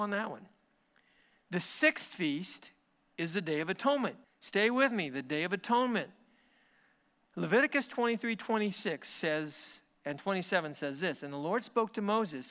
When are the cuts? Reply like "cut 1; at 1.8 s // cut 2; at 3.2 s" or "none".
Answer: cut 1; at 4.2 s